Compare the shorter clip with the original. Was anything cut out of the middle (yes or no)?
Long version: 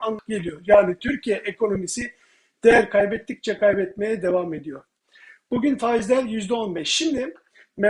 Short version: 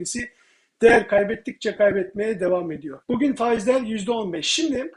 yes